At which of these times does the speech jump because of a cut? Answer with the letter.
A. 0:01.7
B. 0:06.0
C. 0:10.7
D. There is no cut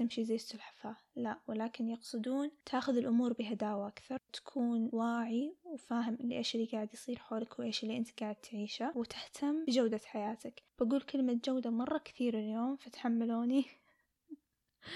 C